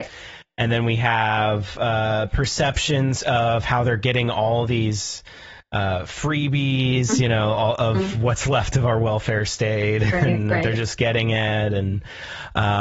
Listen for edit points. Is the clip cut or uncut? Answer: uncut